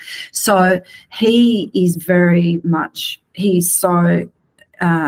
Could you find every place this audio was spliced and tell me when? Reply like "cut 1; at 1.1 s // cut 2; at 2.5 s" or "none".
none